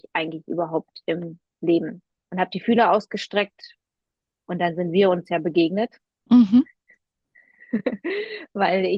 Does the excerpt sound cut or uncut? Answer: uncut